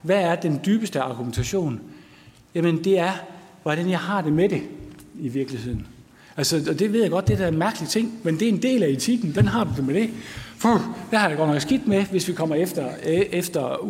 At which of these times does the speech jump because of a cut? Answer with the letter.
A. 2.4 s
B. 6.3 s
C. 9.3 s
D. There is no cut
C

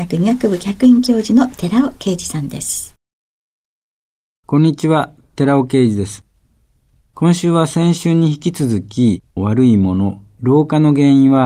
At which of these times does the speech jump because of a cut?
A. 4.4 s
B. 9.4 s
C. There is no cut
B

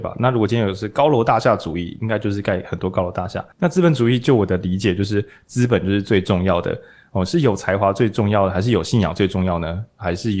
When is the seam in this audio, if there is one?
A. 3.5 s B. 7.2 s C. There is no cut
A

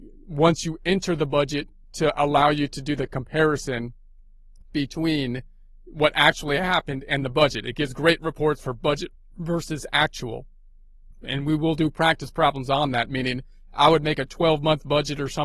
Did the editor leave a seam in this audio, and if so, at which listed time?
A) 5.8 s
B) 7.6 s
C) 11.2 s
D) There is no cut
C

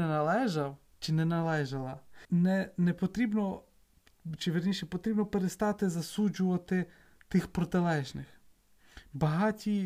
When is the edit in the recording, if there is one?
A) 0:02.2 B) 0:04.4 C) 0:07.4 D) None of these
A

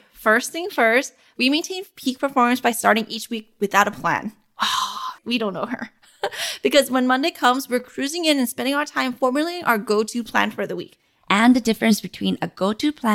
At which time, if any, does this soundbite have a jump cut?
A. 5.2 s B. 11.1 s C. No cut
A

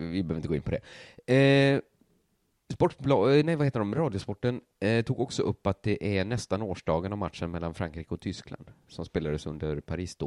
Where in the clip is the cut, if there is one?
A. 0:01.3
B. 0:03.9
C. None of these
C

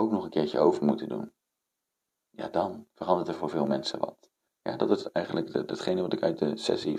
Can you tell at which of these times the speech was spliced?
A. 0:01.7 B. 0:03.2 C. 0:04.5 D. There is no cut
C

